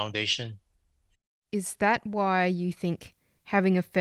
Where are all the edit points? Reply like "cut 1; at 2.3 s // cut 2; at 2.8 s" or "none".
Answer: none